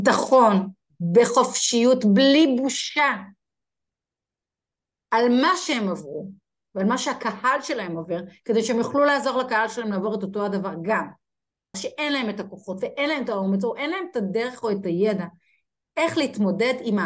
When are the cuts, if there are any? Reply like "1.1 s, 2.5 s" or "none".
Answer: 11.7 s